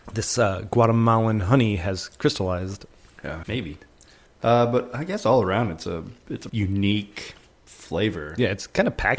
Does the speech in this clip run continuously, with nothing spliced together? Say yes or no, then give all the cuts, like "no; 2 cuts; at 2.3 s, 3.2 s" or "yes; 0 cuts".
no; 2 cuts; at 3.4 s, 6.5 s